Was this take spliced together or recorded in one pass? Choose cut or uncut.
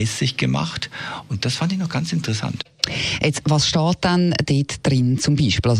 uncut